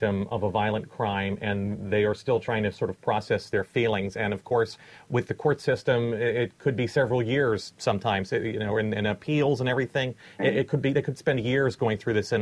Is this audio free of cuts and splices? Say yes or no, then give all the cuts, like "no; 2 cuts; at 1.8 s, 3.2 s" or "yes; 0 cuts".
yes; 0 cuts